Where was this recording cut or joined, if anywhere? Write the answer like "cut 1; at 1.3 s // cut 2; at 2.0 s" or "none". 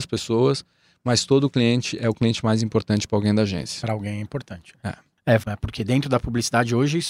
cut 1; at 5.4 s